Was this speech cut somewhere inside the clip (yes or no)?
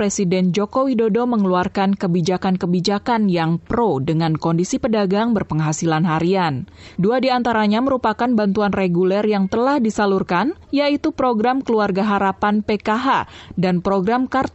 yes